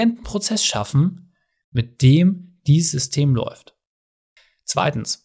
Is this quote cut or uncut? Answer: uncut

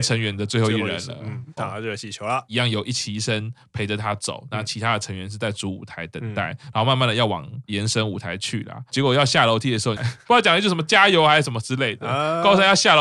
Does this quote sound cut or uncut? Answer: cut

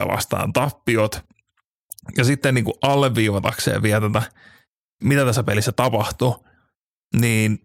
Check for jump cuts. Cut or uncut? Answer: uncut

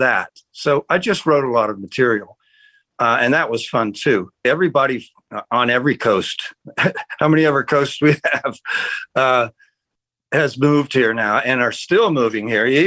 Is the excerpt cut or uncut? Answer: cut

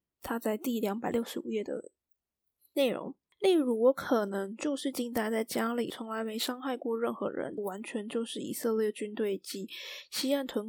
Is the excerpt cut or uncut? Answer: cut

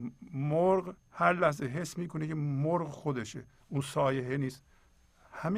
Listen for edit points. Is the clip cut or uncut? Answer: cut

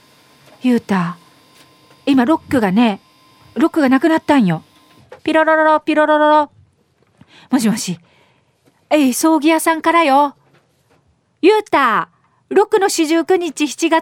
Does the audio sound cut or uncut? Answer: cut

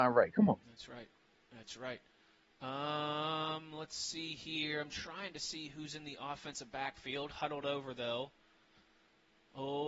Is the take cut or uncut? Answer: uncut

